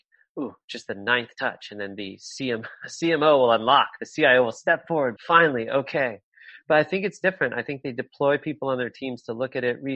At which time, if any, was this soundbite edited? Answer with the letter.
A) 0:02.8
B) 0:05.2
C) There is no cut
B